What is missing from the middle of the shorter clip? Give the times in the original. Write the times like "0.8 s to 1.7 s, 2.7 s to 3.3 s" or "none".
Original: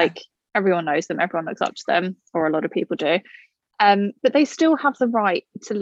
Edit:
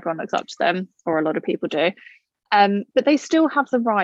none